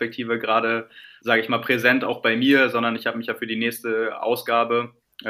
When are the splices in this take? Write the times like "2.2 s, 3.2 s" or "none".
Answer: 1.2 s